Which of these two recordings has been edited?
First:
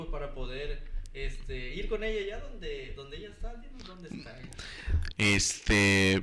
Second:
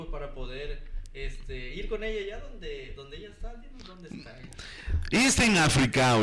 first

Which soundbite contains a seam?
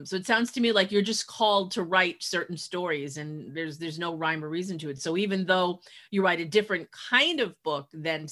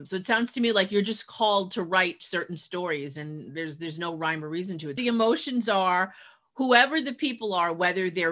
second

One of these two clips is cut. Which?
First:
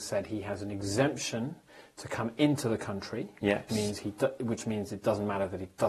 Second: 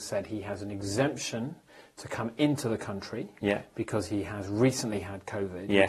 first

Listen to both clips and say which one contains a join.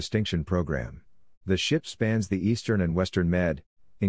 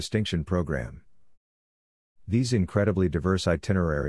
first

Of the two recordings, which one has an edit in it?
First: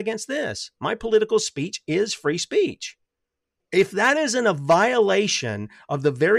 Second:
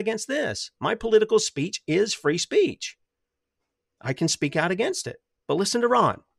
first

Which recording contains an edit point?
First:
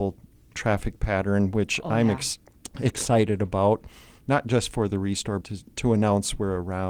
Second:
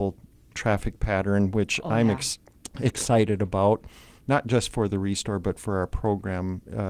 first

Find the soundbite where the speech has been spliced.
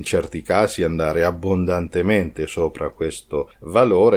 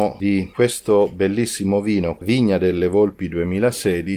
second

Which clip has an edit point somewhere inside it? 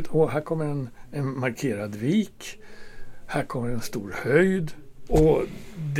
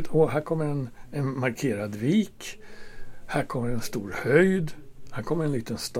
first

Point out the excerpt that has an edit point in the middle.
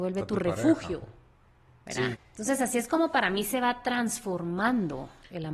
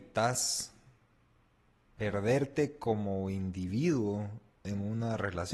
first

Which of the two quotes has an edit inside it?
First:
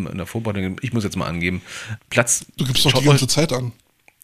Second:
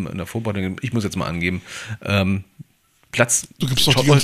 first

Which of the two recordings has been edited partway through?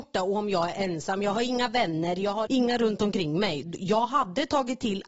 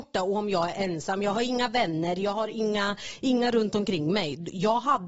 first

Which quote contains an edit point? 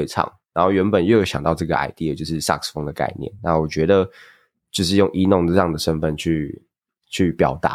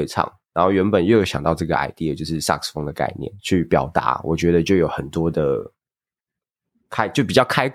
second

